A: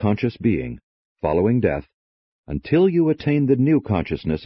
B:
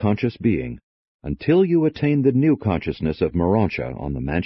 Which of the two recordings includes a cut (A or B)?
B